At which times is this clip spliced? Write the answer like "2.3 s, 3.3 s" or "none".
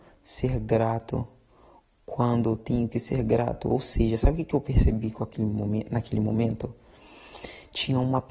none